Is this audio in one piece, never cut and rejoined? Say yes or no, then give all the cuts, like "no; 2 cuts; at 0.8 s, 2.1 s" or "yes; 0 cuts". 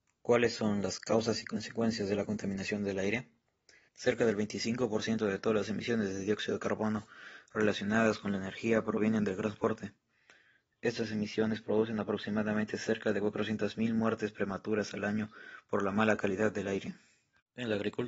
no; 1 cut; at 3.9 s